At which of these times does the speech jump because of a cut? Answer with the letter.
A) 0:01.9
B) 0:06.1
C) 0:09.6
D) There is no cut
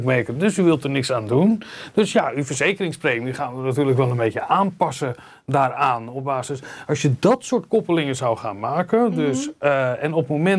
D